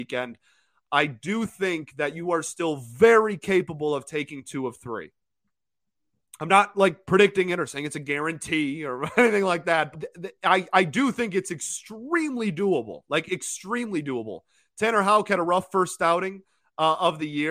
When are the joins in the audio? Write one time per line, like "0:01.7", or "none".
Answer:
0:09.9